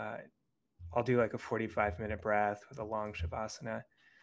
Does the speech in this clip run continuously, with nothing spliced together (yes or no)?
yes